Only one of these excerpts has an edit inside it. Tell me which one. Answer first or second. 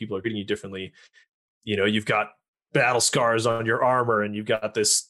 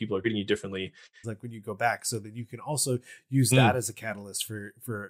second